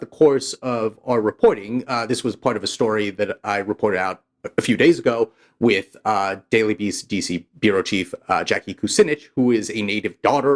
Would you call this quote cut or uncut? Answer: uncut